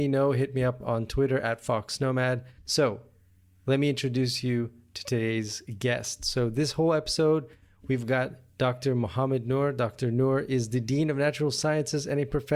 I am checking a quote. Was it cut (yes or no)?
yes